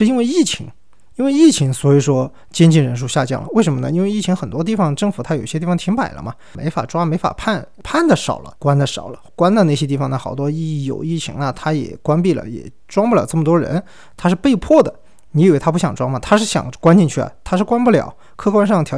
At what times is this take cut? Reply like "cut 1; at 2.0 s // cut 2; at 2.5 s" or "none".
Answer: none